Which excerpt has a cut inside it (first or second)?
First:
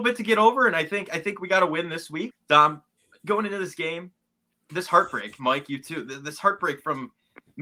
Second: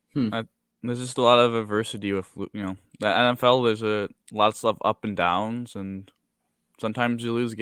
first